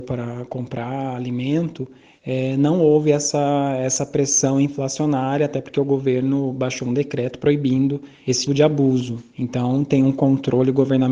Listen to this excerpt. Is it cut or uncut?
cut